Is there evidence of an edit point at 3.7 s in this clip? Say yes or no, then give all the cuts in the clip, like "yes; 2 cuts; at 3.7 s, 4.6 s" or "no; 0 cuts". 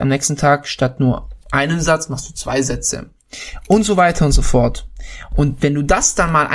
no; 0 cuts